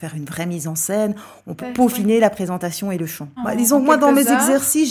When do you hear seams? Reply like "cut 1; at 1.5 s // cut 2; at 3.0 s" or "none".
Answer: cut 1; at 1.6 s // cut 2; at 3.4 s